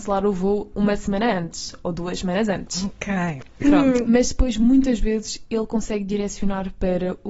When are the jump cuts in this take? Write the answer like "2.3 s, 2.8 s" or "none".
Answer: 4.1 s